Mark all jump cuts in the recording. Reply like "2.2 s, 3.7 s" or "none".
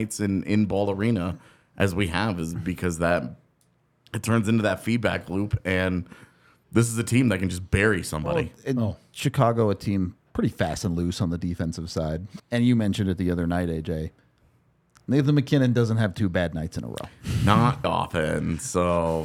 12.4 s, 17.8 s